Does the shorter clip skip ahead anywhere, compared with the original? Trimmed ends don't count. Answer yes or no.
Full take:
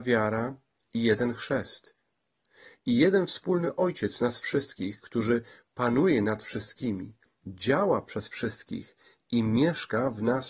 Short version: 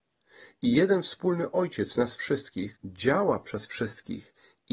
yes